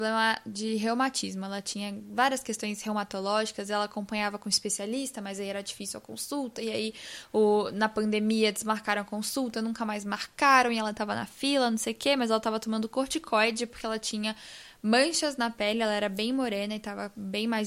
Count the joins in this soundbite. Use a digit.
0